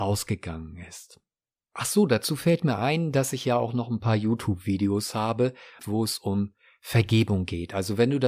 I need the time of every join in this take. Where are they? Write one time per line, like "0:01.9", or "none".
0:01.6
0:05.8